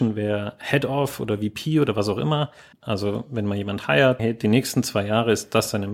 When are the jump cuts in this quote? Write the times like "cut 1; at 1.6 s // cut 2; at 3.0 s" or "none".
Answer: cut 1; at 2.7 s // cut 2; at 4.2 s